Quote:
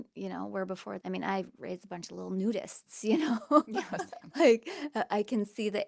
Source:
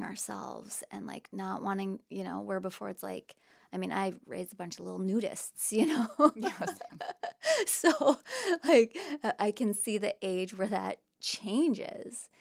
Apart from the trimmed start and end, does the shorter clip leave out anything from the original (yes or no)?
yes